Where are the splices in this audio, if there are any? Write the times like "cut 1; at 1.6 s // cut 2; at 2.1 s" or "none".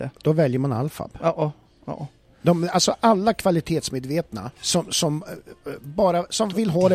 cut 1; at 4.6 s